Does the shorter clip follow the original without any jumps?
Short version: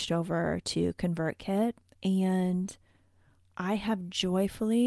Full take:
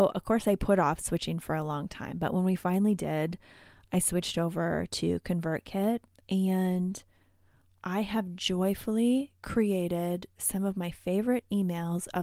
yes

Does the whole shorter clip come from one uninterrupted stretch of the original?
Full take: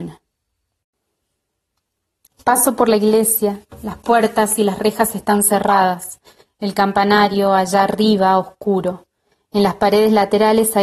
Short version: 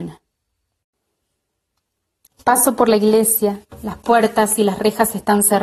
yes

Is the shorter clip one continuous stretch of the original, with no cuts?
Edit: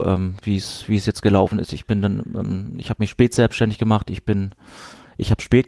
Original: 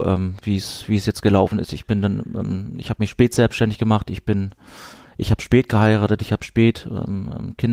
yes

